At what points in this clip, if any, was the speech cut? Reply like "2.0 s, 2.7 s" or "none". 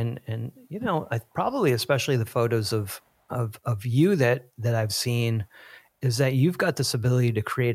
none